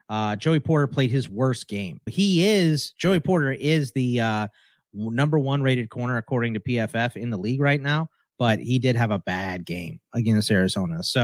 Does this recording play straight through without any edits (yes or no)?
no